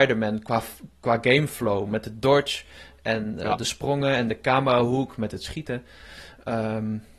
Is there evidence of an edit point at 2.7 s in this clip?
no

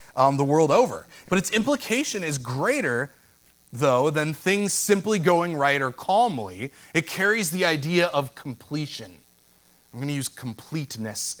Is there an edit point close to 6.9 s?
no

